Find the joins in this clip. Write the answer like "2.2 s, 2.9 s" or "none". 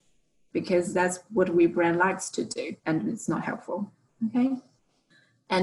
2.8 s

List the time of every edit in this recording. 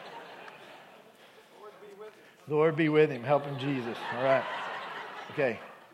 none

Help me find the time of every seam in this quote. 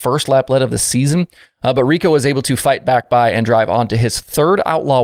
none

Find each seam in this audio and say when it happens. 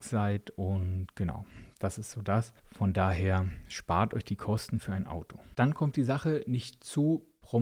2.6 s

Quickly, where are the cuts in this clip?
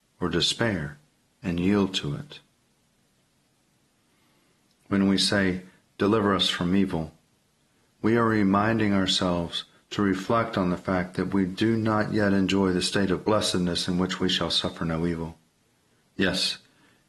16.0 s

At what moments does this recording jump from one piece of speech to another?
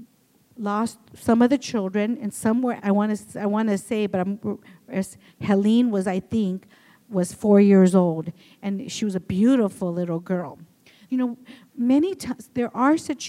2.8 s, 11.1 s

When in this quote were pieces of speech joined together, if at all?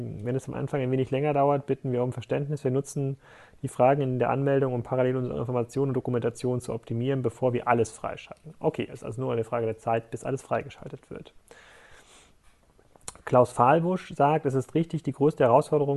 none

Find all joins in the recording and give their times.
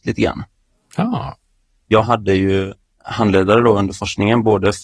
none

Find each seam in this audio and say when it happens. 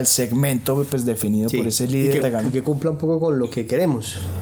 2.2 s

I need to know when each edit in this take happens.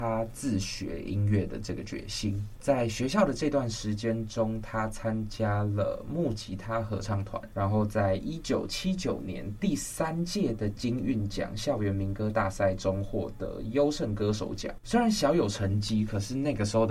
2.6 s

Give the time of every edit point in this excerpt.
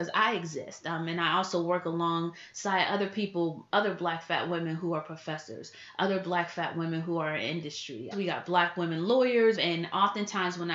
8.1 s, 9.5 s

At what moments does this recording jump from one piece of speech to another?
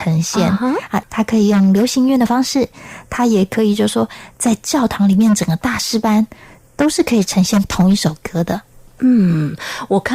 1.0 s

